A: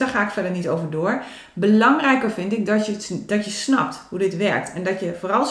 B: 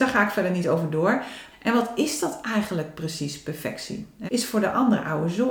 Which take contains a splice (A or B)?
B